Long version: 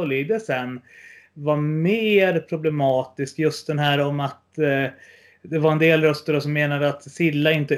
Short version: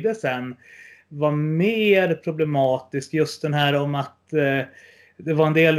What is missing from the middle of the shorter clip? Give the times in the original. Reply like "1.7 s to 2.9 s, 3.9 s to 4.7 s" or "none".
none